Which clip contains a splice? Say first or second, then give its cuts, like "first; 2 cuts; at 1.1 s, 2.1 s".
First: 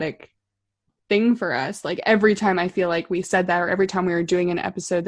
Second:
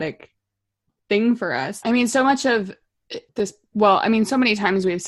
second; 2 cuts; at 1.8 s, 3.3 s